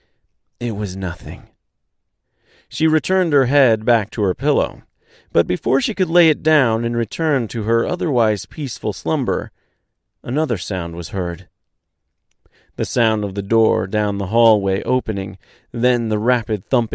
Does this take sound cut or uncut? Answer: uncut